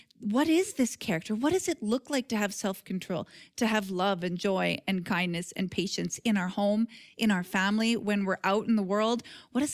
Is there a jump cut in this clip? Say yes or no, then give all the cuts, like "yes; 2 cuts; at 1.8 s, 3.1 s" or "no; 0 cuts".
no; 0 cuts